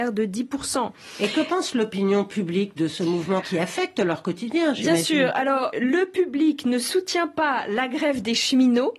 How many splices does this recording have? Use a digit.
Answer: 2